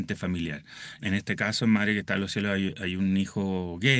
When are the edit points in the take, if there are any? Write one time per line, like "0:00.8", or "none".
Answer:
0:01.0